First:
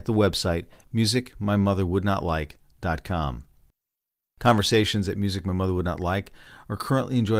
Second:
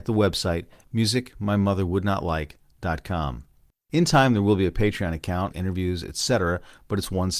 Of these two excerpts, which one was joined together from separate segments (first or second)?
second